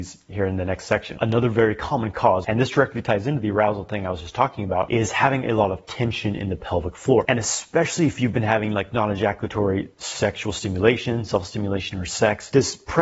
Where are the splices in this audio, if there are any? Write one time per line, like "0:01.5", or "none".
none